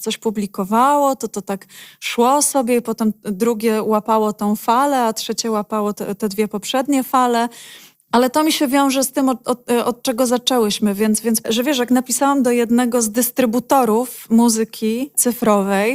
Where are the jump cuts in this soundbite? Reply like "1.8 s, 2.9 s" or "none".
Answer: 7.9 s, 11.4 s